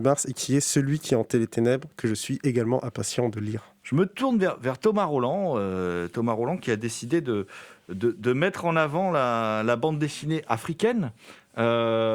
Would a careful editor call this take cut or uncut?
uncut